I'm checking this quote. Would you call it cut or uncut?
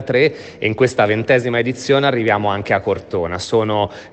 uncut